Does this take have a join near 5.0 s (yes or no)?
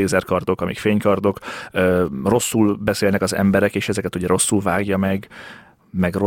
no